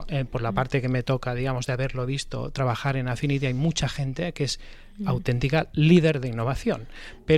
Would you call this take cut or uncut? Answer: uncut